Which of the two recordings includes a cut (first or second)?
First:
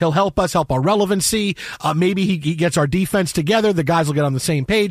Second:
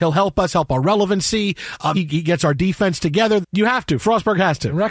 second